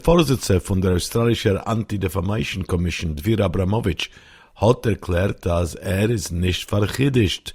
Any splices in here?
no; 0 cuts

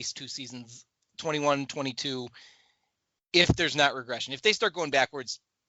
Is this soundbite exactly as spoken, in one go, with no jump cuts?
no; 1 cut; at 1.1 s

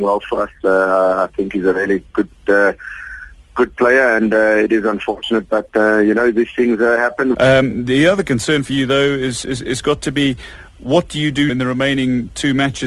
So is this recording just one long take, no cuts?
no; 2 cuts; at 7.3 s, 11.5 s

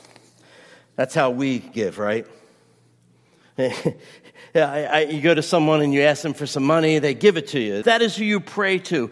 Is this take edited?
yes; 1 cut; at 7.8 s

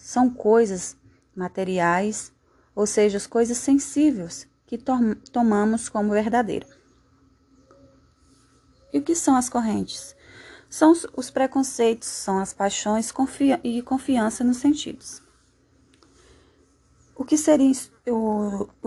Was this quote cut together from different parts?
no; 0 cuts

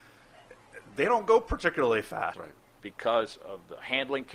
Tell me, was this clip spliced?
yes; 1 cut; at 2.3 s

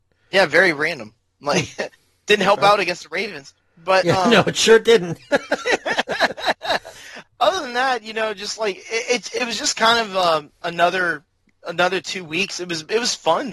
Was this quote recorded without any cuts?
no; 1 cut; at 7.2 s

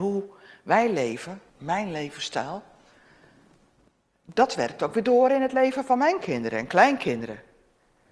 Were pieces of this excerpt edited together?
yes; 1 cut; at 1.5 s

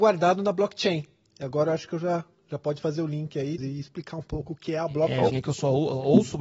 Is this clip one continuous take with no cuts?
no; 2 cuts; at 3.6 s, 5.3 s

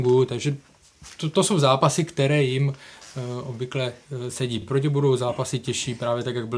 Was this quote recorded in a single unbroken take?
yes; 0 cuts

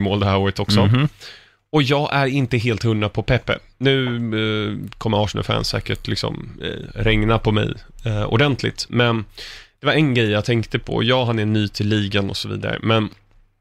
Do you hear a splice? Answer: no; 0 cuts

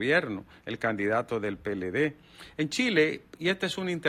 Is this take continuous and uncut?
yes; 0 cuts

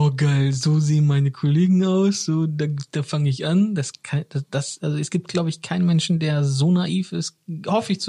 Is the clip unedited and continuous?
yes; 0 cuts

